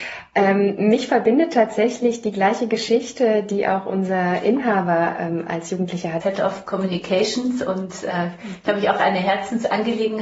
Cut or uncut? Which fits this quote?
cut